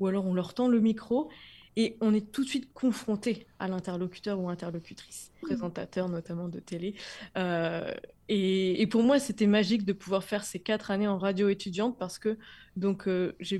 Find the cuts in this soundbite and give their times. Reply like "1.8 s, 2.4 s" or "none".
5.4 s